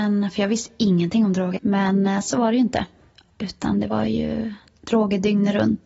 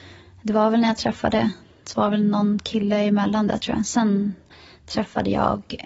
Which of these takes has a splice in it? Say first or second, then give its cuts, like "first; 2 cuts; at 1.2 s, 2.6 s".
first; 1 cut; at 1.6 s